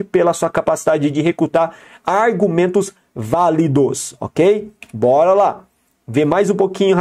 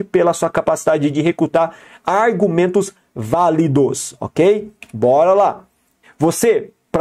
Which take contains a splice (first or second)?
second